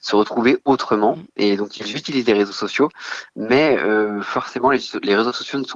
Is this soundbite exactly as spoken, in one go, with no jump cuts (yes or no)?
yes